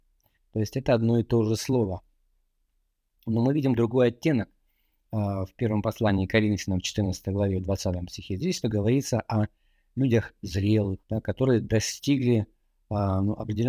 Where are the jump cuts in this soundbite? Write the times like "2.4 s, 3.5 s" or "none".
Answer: 8.6 s, 11.0 s